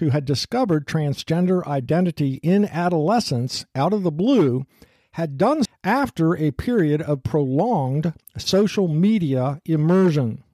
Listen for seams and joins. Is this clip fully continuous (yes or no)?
no